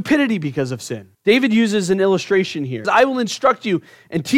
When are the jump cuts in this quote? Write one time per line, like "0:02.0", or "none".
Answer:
0:01.1
0:02.8